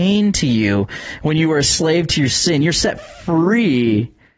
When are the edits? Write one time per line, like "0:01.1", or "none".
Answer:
none